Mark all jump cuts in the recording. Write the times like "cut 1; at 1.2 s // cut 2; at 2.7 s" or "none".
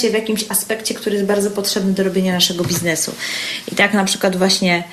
none